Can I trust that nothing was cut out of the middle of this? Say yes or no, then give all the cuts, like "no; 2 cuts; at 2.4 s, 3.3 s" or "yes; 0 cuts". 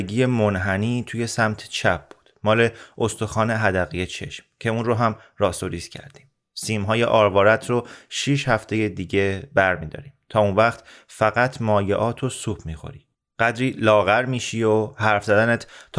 yes; 0 cuts